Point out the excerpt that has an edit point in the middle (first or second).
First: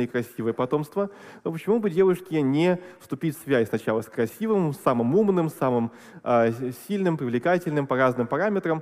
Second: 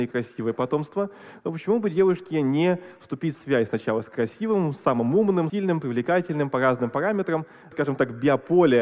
second